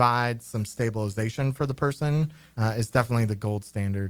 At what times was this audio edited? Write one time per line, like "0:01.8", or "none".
0:02.5